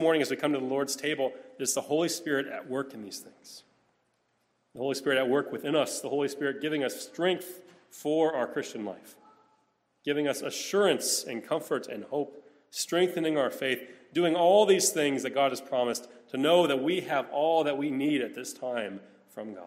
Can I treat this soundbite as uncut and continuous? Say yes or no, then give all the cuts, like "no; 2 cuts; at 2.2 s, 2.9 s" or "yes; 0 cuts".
yes; 0 cuts